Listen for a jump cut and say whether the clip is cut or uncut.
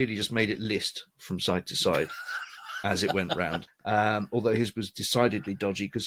cut